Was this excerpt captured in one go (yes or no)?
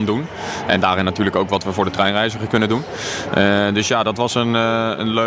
yes